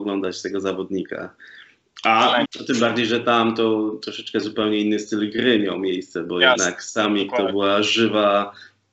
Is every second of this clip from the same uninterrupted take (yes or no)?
no